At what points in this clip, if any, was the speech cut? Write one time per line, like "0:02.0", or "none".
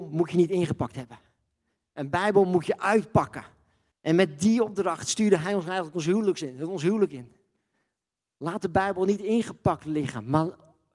0:03.9